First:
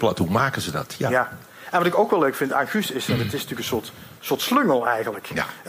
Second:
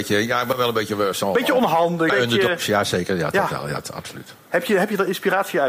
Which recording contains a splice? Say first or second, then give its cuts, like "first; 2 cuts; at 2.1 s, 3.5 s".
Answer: second; 1 cut; at 2.1 s